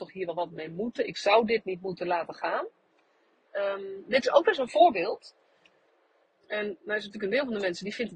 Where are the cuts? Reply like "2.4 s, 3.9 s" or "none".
3.4 s, 6.2 s